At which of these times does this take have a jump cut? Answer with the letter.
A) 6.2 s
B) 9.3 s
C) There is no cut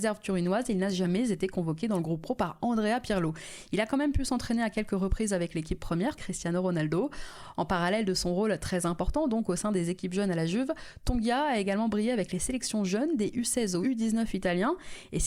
A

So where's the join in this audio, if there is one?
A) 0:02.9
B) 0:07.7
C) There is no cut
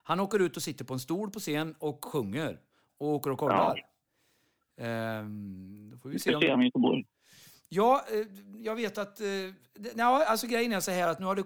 A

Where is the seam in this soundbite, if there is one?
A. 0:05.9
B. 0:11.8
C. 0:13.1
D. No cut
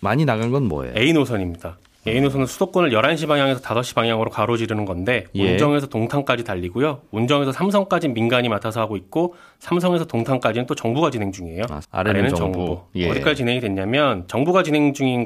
B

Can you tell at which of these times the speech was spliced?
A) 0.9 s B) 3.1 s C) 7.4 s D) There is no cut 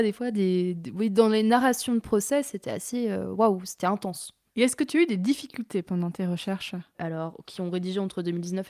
C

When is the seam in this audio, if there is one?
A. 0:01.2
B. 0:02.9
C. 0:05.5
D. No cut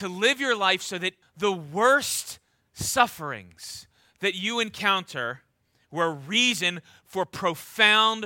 A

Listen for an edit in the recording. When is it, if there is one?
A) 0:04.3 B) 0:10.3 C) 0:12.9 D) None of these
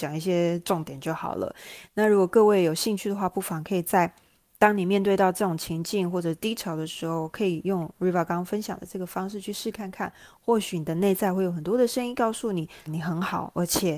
C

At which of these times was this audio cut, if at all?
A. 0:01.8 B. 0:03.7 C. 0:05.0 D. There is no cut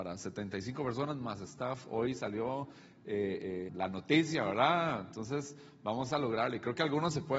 B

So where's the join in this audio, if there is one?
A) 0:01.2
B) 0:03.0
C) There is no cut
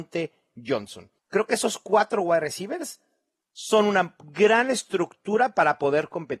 A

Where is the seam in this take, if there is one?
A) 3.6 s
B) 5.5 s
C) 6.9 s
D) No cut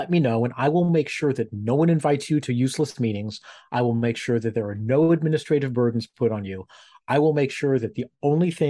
D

